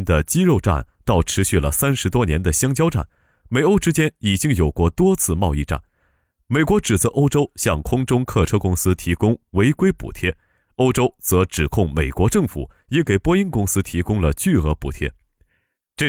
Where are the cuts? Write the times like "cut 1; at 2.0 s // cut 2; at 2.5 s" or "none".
none